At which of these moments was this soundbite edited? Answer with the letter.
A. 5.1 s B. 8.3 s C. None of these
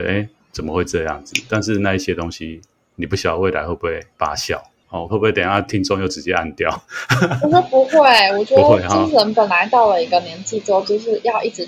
A